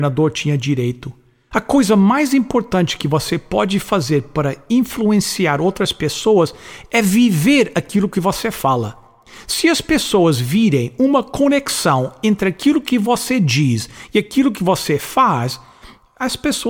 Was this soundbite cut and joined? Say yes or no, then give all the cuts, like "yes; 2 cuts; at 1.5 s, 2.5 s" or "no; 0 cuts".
yes; 1 cut; at 1.5 s